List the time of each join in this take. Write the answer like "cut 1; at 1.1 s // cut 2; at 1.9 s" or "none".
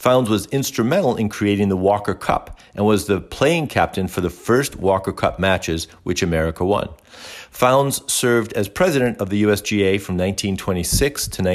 none